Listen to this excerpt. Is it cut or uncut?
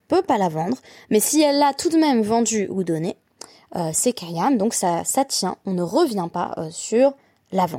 uncut